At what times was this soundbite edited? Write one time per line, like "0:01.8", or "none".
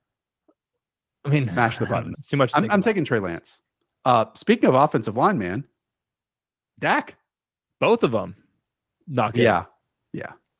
0:02.1